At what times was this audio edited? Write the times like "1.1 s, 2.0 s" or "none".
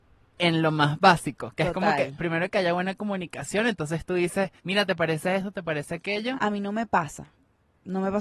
4.6 s, 6.3 s